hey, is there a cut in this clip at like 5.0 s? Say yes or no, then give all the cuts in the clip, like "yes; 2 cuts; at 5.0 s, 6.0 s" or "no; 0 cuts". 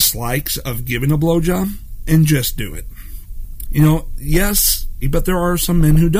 yes; 2 cuts; at 3.7 s, 5.0 s